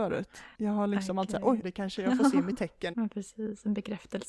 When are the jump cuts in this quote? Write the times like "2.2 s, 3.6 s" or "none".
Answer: 1.6 s, 2.9 s